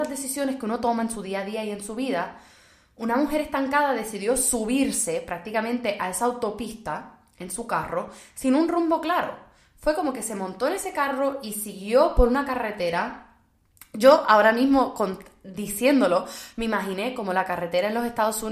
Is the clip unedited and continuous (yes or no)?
yes